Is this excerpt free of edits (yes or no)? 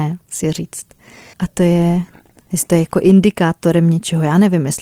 no